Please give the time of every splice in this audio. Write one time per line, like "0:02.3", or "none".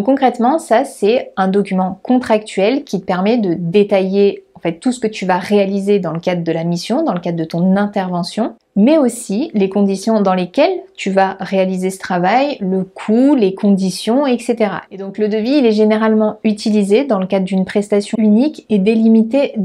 0:14.9
0:18.1